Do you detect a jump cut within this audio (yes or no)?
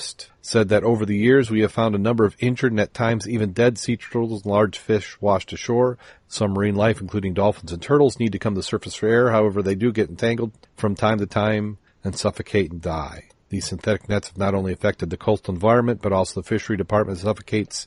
yes